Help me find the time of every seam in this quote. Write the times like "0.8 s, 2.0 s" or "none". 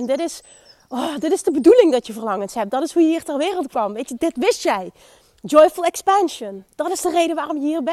4.2 s